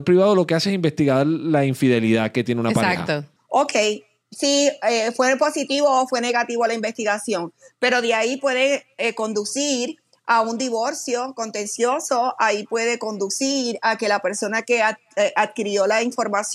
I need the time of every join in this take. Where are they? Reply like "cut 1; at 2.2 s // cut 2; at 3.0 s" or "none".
cut 1; at 3.4 s